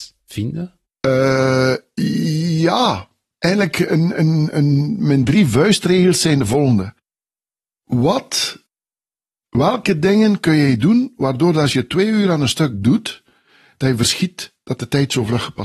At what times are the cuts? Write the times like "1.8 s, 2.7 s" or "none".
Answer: none